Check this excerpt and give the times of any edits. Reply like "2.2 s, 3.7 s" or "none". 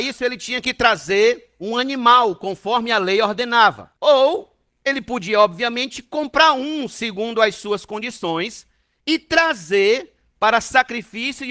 4.0 s